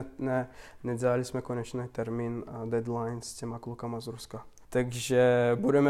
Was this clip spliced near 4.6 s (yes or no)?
yes